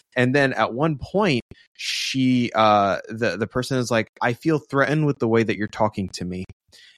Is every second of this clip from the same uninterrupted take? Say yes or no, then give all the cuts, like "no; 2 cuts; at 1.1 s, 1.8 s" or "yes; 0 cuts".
yes; 0 cuts